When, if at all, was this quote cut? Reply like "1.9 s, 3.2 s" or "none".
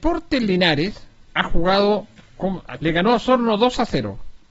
1.3 s, 2.8 s